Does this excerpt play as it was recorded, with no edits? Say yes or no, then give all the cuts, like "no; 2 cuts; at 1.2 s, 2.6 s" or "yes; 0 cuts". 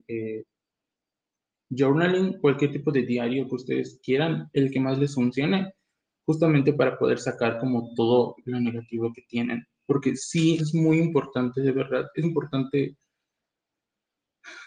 no; 2 cuts; at 10.6 s, 12.2 s